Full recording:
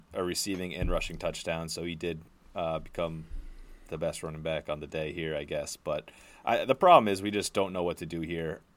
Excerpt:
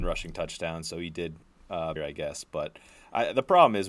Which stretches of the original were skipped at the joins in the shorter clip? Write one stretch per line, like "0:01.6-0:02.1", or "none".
0:02.8-0:05.3